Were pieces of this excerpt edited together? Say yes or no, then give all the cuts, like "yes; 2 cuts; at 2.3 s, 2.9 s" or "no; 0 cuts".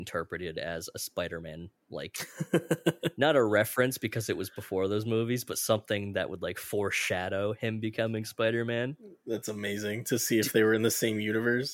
no; 0 cuts